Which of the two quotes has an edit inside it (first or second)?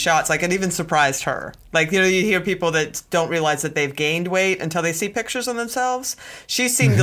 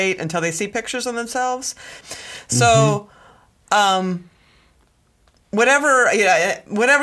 second